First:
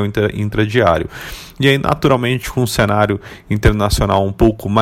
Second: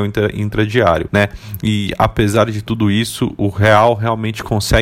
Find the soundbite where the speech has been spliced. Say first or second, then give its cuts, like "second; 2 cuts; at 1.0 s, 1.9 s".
second; 2 cuts; at 1.1 s, 3.4 s